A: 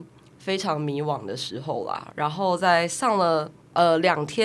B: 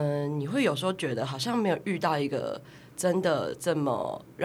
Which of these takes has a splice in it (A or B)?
A